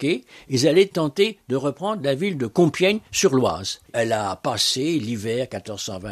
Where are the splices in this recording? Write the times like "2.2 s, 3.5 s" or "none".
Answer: 3.9 s

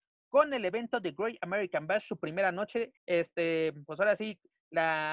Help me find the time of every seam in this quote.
3.0 s

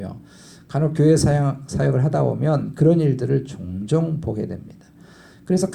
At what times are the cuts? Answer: none

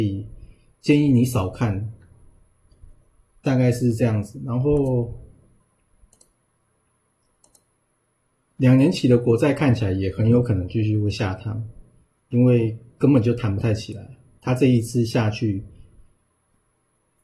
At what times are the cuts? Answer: none

